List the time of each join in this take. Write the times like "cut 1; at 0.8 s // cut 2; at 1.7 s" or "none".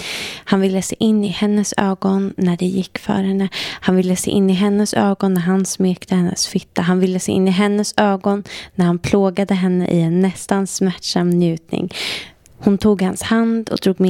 cut 1; at 12.4 s